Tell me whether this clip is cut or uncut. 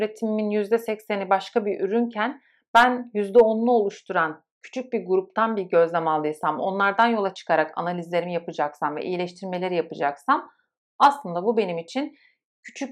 uncut